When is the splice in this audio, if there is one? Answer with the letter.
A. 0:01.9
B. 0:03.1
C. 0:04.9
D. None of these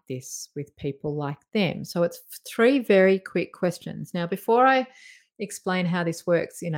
D